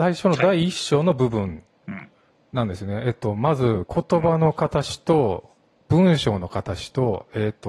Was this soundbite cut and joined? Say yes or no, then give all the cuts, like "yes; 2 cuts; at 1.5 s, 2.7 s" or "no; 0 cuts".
no; 0 cuts